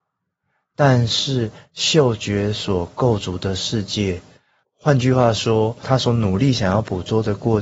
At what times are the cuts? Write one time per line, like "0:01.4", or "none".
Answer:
0:04.6
0:05.8